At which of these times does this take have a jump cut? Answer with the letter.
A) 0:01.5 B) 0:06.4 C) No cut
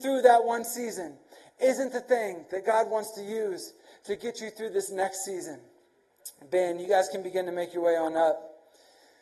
C